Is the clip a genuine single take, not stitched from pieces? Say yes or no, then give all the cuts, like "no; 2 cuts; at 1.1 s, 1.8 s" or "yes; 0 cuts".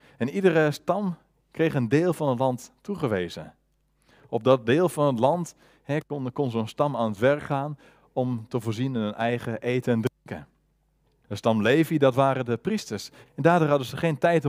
no; 2 cuts; at 11.2 s, 13.3 s